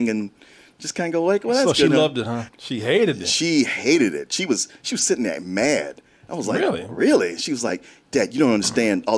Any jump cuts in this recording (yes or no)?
yes